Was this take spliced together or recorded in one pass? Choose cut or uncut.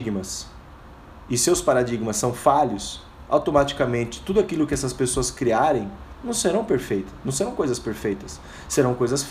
uncut